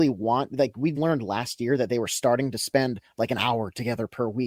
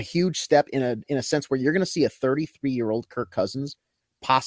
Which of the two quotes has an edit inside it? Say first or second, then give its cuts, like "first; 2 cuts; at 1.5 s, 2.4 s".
first; 1 cut; at 0.9 s